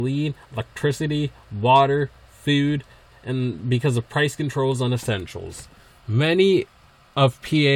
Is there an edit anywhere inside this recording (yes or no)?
yes